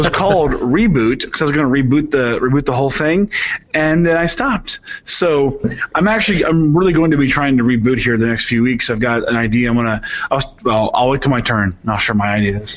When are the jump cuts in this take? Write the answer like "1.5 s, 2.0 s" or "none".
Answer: none

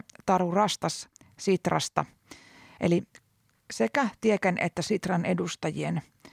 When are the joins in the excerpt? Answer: 2.8 s

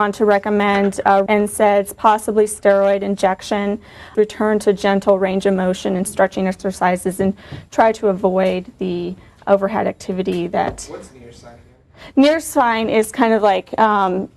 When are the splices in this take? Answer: 1.3 s, 4.1 s

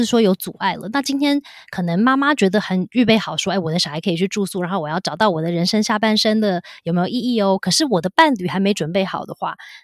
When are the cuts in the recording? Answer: none

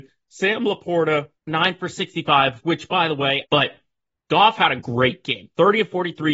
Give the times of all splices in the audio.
1.4 s, 3.4 s

